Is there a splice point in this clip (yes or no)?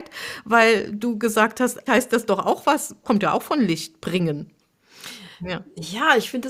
yes